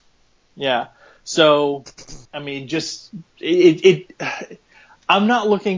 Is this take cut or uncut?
cut